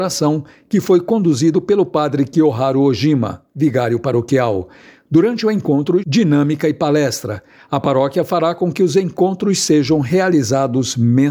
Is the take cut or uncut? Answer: cut